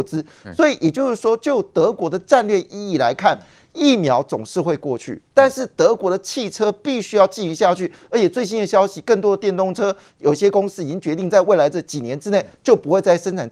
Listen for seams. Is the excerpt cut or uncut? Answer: uncut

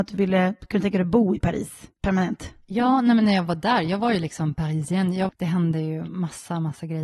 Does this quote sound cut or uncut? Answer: cut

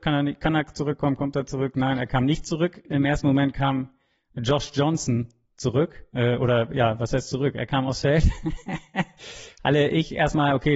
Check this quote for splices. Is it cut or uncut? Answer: uncut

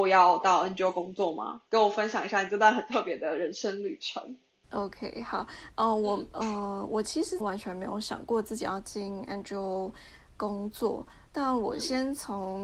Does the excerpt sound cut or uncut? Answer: cut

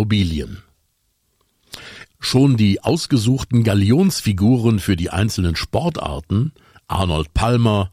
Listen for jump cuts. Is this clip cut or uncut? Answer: cut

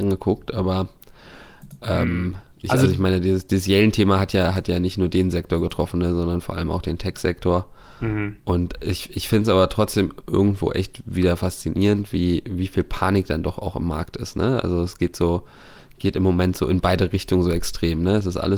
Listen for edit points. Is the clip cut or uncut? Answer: cut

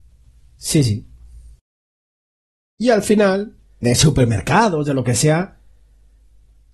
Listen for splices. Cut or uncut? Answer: cut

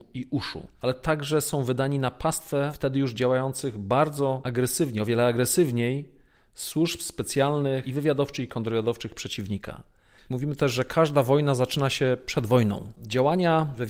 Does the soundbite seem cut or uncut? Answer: cut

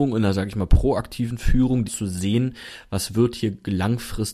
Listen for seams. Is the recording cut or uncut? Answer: cut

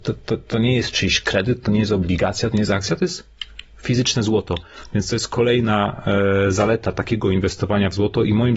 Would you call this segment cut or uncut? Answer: uncut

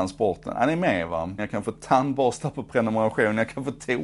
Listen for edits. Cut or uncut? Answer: cut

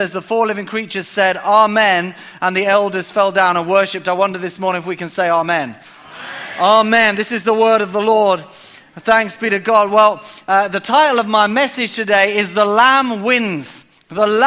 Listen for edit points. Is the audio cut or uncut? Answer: uncut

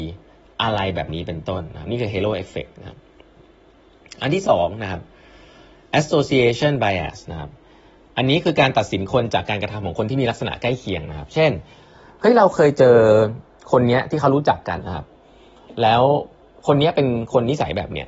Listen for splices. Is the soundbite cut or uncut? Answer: cut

